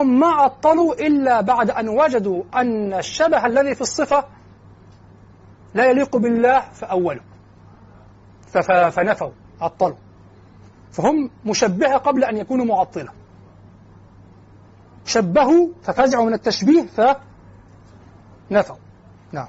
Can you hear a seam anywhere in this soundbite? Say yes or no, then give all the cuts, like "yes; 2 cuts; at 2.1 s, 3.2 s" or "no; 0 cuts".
no; 0 cuts